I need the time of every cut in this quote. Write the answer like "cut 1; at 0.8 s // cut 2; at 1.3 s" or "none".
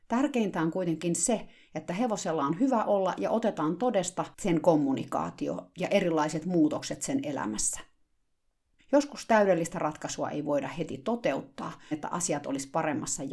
cut 1; at 8.8 s // cut 2; at 11.9 s